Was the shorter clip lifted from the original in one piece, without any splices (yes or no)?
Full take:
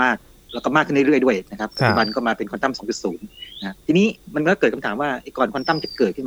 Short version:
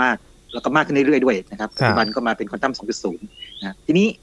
yes